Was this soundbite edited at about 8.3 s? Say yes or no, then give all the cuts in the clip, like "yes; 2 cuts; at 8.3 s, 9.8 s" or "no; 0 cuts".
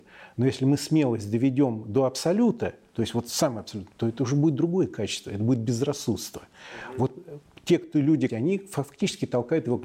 yes; 1 cut; at 8.3 s